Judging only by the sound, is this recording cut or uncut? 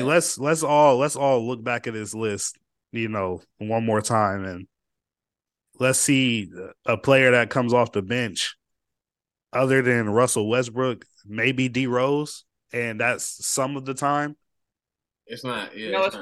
uncut